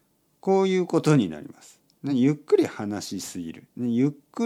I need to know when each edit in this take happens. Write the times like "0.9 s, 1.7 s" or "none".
none